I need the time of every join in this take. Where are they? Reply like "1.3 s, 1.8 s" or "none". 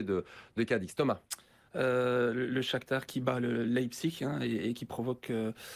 1.7 s, 3.1 s